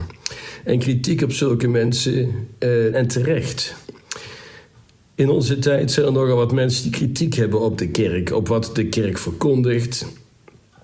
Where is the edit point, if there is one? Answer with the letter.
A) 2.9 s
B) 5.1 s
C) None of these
A